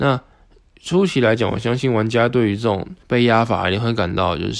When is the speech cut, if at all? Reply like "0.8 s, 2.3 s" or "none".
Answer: 3.0 s